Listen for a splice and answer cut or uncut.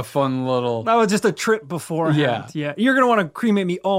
uncut